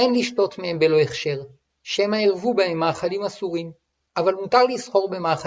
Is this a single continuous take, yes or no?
no